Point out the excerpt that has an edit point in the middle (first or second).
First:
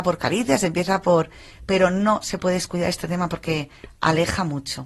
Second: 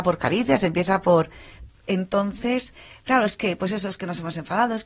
second